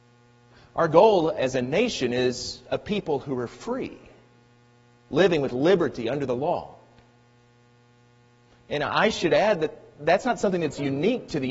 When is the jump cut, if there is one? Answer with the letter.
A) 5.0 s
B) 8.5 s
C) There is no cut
C